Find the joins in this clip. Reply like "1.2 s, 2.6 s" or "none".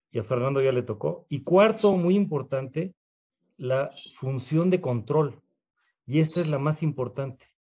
none